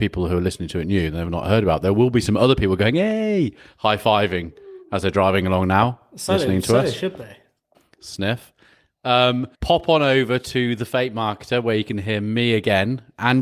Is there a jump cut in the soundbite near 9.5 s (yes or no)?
yes